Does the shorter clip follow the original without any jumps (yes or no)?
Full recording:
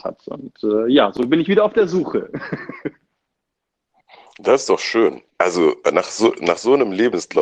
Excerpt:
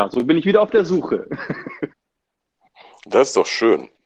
no